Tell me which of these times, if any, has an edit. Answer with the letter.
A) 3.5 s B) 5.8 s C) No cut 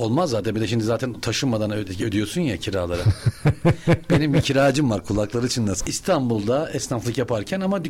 B